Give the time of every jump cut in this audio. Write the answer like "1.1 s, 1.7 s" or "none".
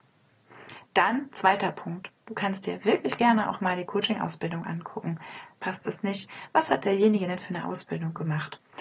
5.6 s